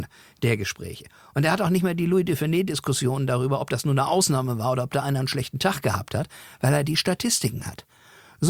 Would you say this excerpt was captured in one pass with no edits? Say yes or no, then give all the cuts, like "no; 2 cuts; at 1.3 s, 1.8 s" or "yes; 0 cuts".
yes; 0 cuts